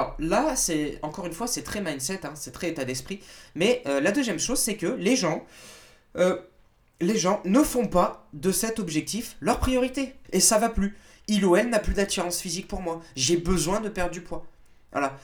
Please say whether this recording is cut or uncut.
cut